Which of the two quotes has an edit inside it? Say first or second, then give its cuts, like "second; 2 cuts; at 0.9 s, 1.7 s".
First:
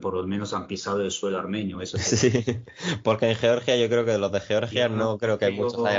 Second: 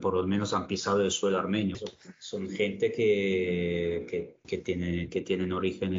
second; 2 cuts; at 1.7 s, 4.4 s